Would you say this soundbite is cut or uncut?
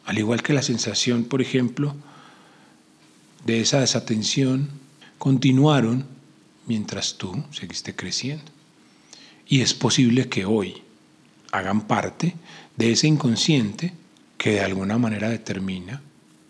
uncut